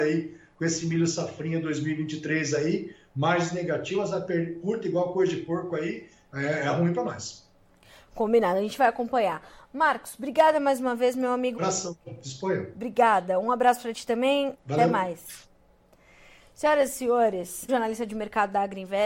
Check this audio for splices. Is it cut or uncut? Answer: cut